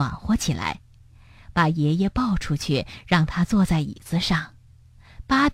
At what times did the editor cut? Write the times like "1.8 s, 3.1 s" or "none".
1.5 s